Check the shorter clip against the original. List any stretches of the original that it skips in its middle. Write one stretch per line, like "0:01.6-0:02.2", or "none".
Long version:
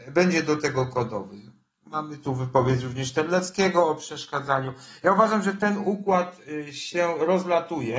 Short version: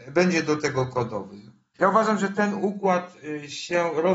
0:01.8-0:05.0